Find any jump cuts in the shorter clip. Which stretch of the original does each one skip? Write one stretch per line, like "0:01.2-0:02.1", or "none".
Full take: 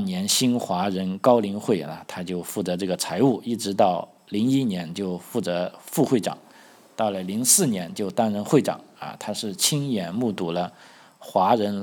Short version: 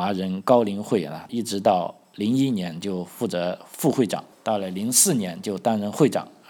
0:02.1-0:03.4
0:06.5-0:06.8